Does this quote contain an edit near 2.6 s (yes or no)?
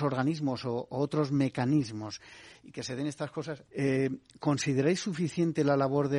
yes